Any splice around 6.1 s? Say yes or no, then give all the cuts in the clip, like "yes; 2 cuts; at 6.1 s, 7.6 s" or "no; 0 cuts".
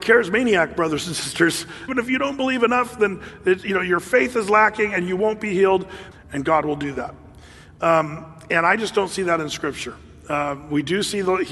yes; 2 cuts; at 1.9 s, 6.1 s